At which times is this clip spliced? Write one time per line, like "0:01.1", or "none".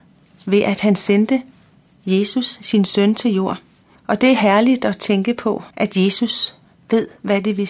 0:04.0
0:05.7